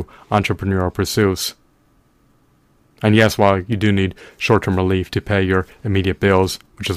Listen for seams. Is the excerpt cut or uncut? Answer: uncut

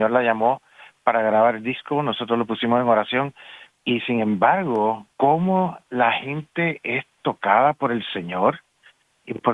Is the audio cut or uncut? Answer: cut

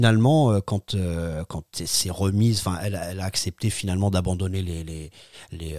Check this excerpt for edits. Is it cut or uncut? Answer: uncut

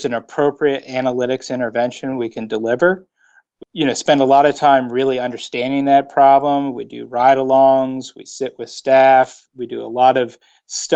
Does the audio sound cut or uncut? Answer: cut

